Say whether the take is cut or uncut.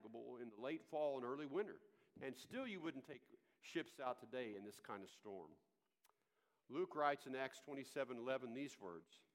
cut